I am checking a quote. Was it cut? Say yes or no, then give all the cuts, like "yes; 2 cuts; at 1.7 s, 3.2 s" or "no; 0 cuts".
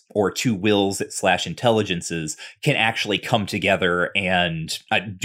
no; 0 cuts